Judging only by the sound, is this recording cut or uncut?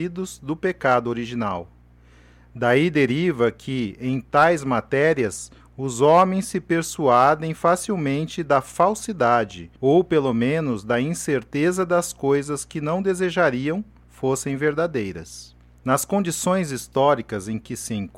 cut